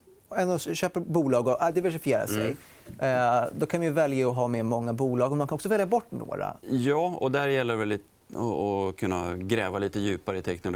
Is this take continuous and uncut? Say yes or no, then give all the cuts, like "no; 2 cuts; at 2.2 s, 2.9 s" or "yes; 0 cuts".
no; 1 cut; at 6.6 s